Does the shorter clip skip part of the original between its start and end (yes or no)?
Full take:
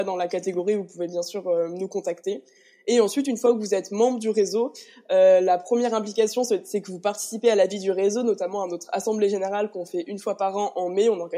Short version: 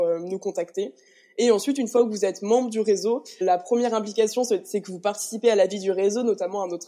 yes